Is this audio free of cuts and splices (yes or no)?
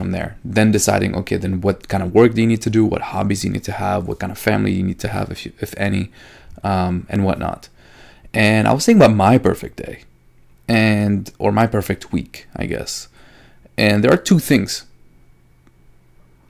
yes